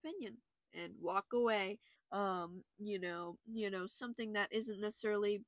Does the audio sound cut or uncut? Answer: cut